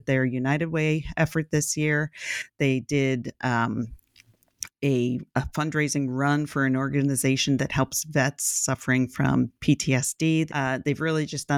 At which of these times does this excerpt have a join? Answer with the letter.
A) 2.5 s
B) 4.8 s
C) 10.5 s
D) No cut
C